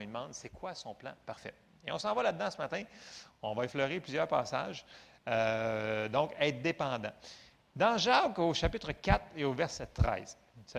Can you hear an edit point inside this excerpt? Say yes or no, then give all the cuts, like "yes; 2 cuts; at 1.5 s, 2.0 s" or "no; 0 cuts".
no; 0 cuts